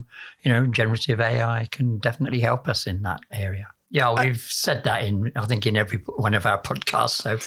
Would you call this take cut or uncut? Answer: cut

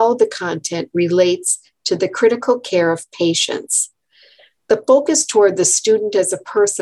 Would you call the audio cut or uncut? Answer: uncut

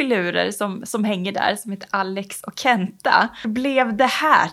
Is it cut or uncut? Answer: cut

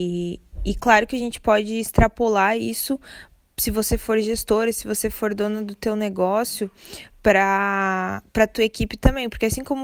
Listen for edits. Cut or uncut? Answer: uncut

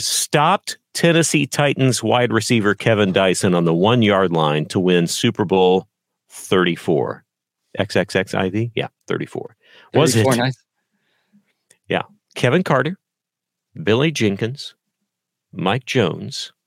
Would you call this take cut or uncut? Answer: uncut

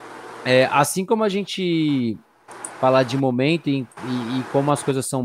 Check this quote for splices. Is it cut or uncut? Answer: uncut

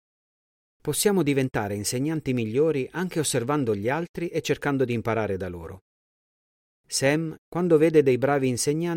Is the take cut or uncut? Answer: cut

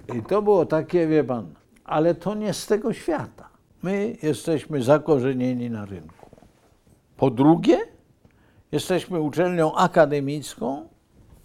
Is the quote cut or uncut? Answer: cut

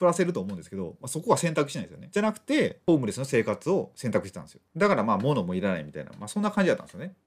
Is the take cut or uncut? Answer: cut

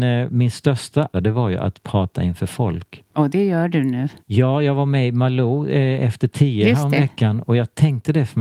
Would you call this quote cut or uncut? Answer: cut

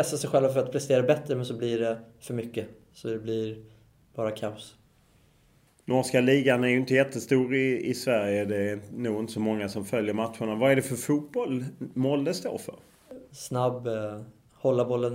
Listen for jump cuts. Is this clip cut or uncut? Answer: cut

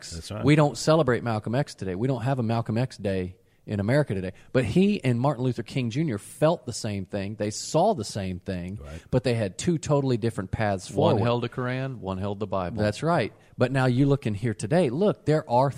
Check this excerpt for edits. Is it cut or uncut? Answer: uncut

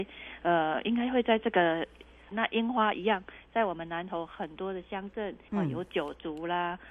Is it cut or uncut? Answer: cut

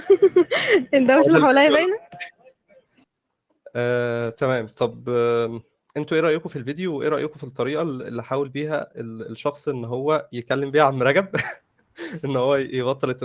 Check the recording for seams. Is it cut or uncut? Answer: uncut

